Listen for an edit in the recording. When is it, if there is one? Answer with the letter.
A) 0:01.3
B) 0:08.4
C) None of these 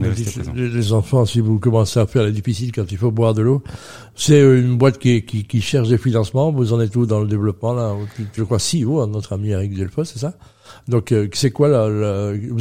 B